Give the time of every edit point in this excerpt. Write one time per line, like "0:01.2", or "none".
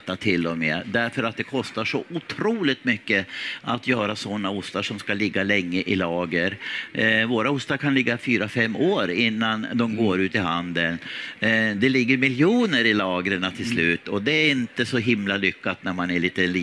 none